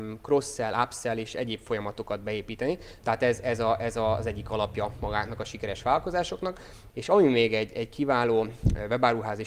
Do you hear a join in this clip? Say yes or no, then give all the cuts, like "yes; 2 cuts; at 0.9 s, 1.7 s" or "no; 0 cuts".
yes; 2 cuts; at 3.0 s, 6.9 s